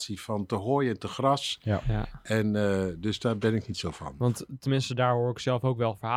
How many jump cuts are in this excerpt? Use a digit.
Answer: 0